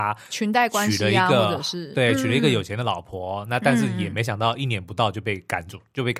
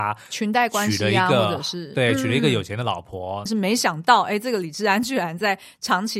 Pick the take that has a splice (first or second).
second